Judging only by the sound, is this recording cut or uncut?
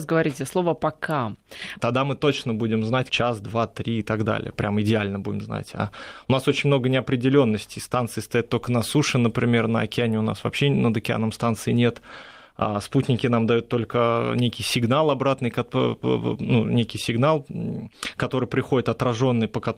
cut